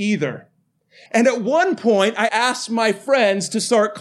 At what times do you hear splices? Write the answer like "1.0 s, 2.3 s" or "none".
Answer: 1.1 s, 2.3 s

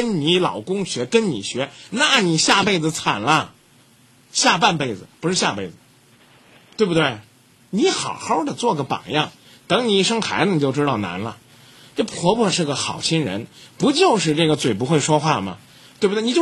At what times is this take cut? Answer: none

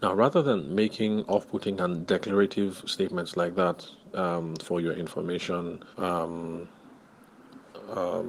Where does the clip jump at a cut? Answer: 5.9 s

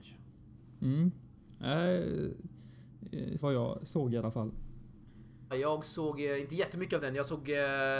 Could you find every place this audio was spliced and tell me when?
3.4 s, 5.5 s

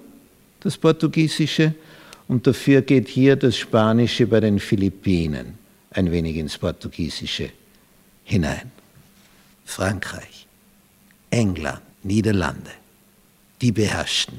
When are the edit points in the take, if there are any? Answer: 9.5 s, 11.9 s

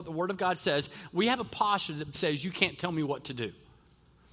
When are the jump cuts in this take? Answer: 2.1 s

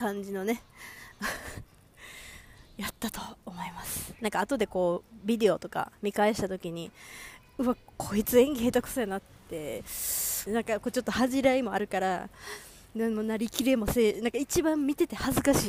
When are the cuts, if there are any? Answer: 10.5 s

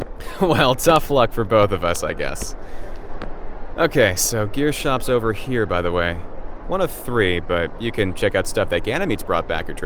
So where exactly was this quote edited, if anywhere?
none

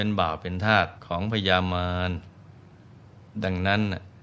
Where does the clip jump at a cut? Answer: 1.0 s

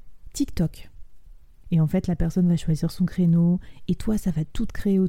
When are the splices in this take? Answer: 1.6 s

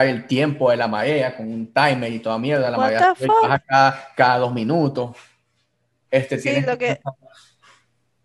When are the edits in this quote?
none

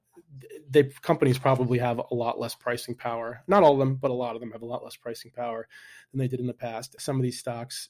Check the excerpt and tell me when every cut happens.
7.0 s

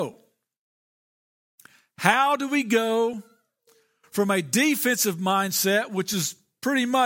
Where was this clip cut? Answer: none

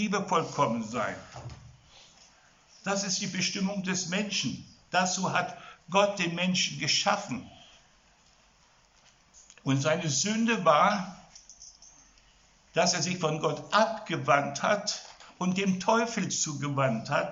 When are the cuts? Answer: none

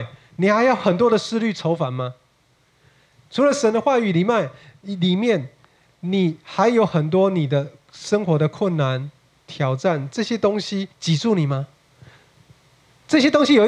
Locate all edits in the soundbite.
10.9 s

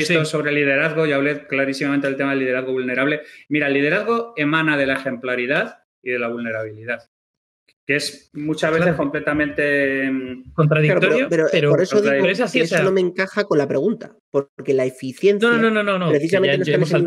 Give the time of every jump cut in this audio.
none

